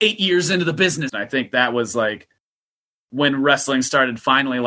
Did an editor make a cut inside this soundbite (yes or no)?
yes